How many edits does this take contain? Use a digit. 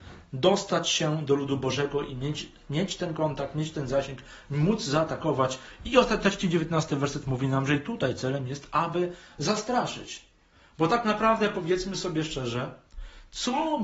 0